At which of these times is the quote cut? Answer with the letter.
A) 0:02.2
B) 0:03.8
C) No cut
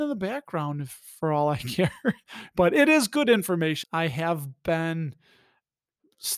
B